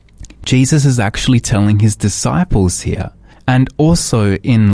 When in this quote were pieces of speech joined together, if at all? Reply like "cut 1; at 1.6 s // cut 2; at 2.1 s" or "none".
cut 1; at 3.3 s